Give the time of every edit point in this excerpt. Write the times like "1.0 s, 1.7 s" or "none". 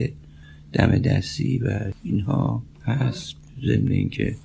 2.7 s